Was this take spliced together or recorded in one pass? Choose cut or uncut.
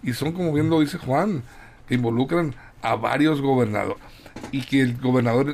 cut